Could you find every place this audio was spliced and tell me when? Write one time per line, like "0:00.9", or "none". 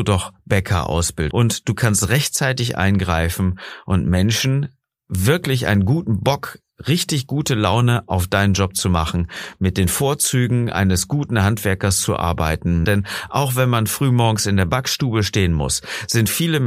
0:01.3
0:12.8

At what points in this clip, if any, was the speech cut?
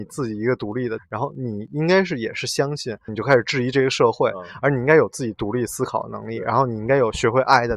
0:01.0
0:03.1

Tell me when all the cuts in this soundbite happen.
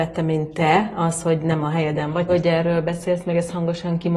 0:02.3

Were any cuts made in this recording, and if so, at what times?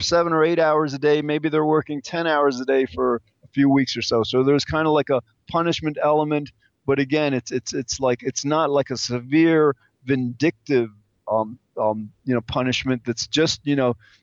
none

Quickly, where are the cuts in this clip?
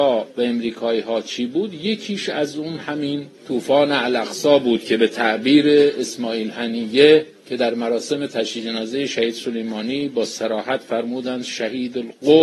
0:03.4
0:07.4

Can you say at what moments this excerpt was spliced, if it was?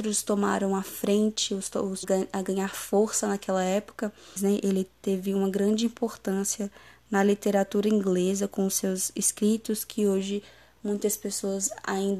0:02.0
0:04.4

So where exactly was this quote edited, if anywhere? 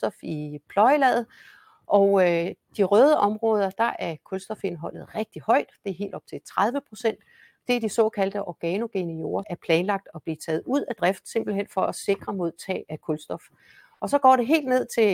0:09.4
0:12.8

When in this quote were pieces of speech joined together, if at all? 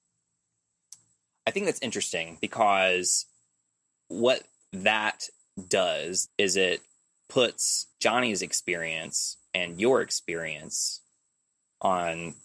0:06.3
0:07.9

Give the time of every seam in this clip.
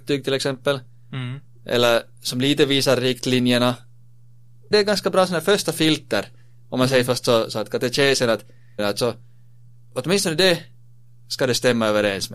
0:04.7
0:08.8

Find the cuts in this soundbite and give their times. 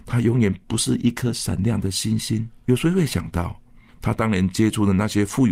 0:02.5

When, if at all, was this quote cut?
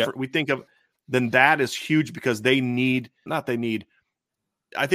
0:03.3

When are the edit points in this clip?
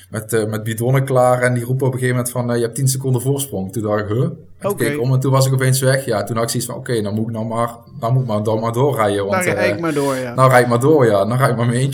none

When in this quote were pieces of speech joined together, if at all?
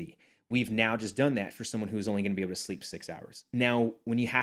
none

